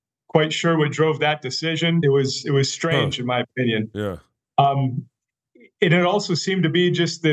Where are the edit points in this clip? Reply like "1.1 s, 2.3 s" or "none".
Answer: 2.0 s